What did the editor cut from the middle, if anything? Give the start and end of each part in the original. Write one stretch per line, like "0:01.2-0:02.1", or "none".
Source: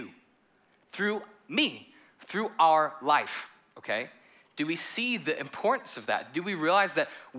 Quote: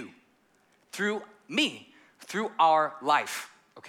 none